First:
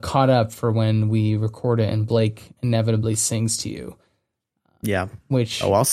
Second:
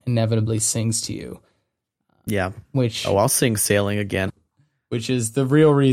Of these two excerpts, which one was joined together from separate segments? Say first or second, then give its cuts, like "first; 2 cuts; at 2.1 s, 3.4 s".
second; 1 cut; at 4.3 s